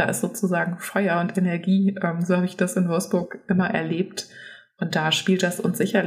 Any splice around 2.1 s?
no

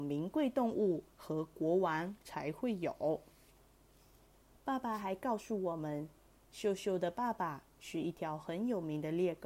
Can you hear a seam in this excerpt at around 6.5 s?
no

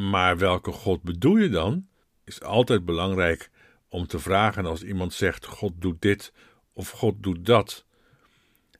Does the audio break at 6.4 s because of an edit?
no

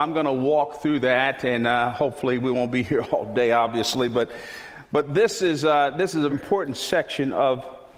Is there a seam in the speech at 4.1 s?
no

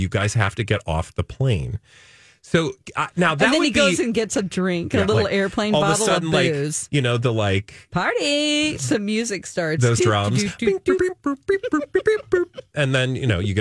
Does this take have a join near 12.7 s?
no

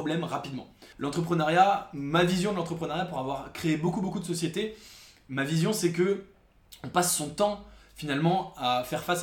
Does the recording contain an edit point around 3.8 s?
no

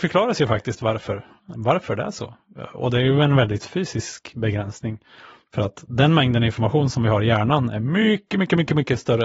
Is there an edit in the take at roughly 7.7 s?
no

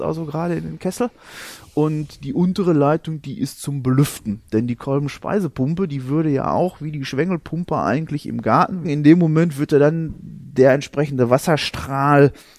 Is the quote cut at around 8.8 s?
yes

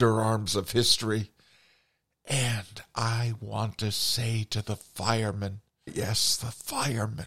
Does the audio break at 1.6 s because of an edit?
no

